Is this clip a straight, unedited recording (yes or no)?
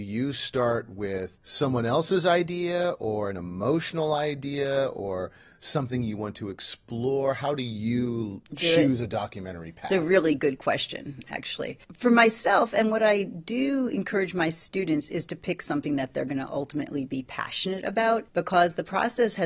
yes